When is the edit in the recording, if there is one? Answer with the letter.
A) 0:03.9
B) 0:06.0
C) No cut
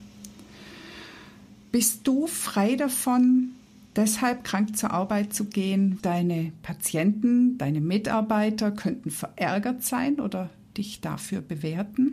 B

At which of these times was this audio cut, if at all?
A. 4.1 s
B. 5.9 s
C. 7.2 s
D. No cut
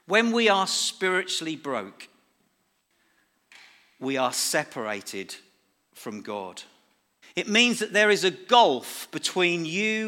C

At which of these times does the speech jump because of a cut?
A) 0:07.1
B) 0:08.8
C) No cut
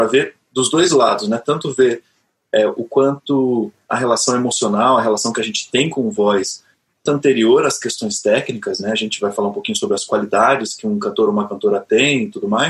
A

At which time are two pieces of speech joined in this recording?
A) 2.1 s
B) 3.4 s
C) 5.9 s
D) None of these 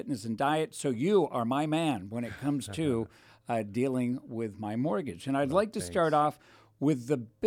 D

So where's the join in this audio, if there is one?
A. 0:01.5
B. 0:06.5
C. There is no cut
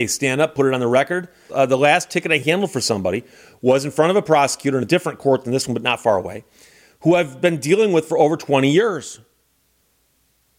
A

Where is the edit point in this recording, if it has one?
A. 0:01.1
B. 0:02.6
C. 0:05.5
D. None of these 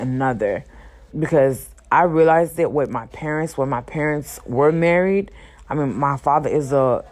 A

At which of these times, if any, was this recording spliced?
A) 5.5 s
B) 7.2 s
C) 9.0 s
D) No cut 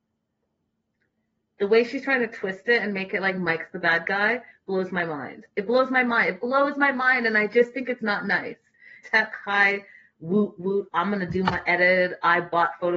C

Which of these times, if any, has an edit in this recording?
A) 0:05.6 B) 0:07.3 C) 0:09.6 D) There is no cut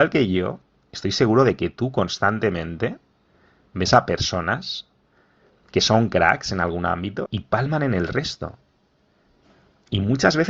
B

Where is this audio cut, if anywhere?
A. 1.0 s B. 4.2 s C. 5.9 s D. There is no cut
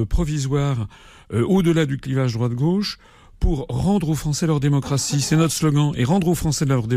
D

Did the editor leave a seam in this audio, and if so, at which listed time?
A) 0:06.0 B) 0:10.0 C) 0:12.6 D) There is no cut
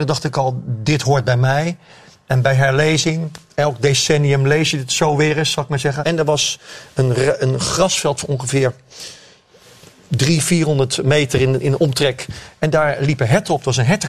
A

